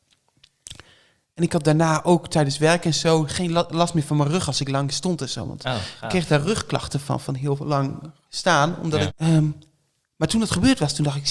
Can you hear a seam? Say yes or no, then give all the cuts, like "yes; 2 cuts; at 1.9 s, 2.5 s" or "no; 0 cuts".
yes; 1 cut; at 9.1 s